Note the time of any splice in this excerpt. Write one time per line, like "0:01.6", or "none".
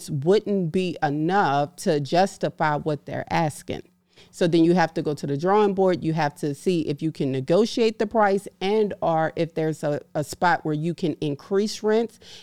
none

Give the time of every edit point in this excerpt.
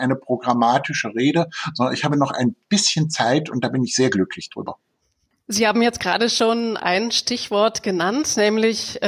none

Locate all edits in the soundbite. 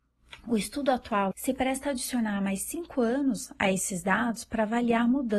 0:01.3

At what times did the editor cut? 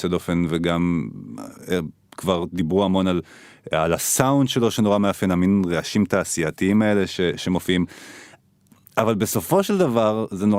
none

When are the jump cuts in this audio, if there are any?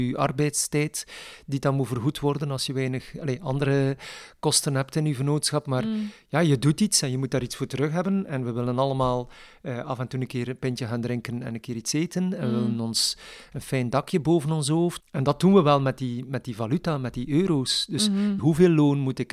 0:15.0
0:18.4

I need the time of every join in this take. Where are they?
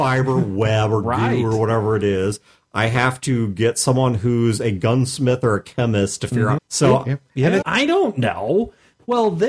0:06.6
0:07.6

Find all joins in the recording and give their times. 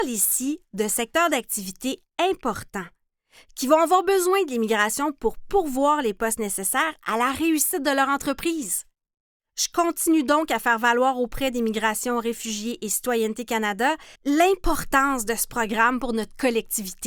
0:14.1

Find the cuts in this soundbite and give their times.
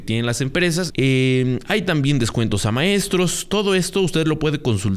0:00.9

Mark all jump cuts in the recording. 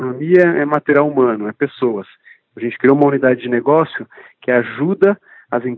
none

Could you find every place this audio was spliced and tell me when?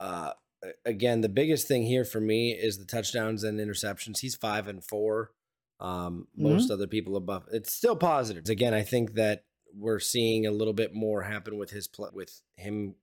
0:08.4
0:12.1

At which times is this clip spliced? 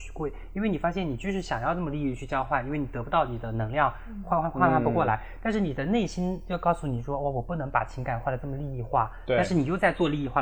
none

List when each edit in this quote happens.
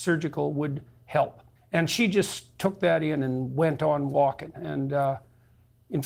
0:01.6

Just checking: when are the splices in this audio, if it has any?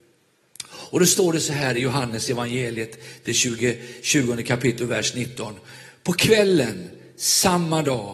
none

